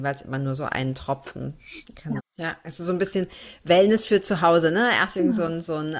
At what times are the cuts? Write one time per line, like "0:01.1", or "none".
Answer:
0:02.2